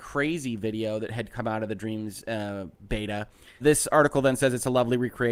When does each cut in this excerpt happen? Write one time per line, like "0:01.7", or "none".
0:03.6